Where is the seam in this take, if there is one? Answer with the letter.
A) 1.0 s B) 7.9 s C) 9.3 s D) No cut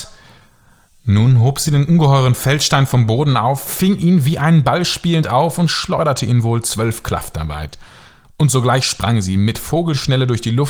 D